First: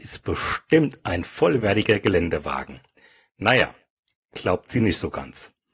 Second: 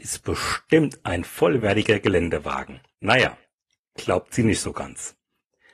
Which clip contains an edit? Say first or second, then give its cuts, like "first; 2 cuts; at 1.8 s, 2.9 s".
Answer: second; 1 cut; at 2.9 s